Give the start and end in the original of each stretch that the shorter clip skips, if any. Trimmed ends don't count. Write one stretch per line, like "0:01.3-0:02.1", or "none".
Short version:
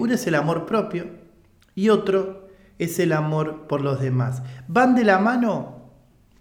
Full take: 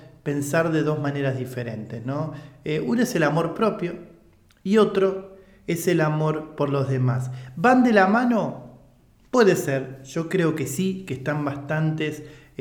none

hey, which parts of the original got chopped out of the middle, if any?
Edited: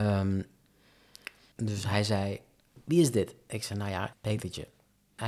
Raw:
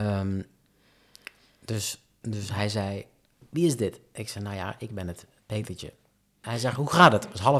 0:01.5-0:02.2
0:04.8-0:05.4

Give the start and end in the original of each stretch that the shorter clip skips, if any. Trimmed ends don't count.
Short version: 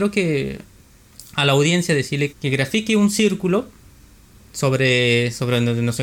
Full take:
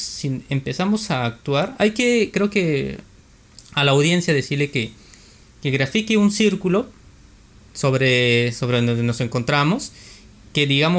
0:04.7-0:05.5

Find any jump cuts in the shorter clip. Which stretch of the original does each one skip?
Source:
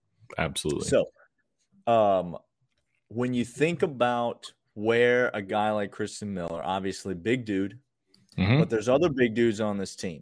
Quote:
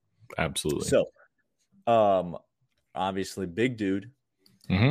0:02.9-0:06.6

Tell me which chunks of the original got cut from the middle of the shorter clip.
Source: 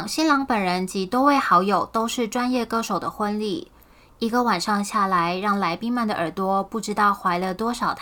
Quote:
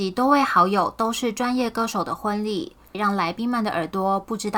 0:03.9-0:05.4

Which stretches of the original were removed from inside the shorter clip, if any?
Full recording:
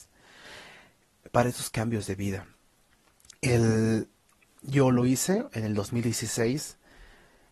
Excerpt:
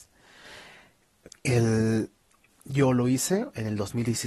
0:01.3-0:03.3

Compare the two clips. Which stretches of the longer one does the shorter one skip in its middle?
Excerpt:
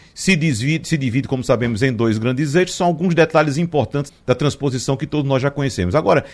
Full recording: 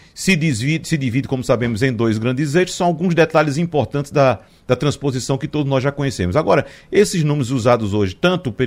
0:04.1-0:04.5

